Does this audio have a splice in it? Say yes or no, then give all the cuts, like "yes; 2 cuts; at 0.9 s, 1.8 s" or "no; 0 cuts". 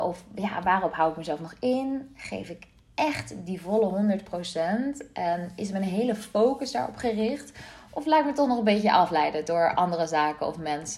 no; 0 cuts